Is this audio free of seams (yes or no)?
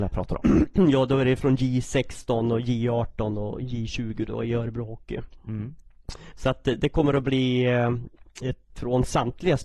no